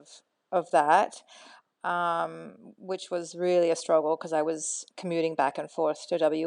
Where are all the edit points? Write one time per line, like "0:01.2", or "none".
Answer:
0:04.9